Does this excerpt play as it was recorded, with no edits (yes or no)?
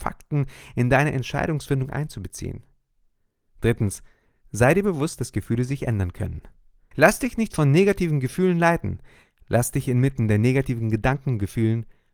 no